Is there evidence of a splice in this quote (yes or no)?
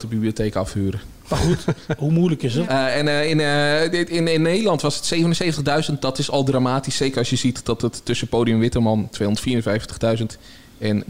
yes